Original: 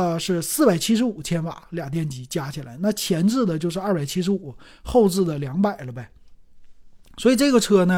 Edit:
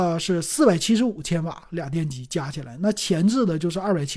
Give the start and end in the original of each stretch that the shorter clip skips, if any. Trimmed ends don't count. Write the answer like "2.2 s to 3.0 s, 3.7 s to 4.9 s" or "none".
none